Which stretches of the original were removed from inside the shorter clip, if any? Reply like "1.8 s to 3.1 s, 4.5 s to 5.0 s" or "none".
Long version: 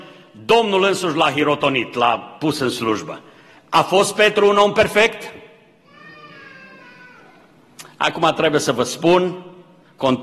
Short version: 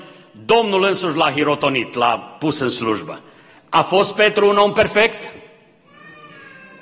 none